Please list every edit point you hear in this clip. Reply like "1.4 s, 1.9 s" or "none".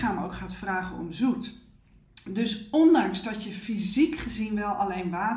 none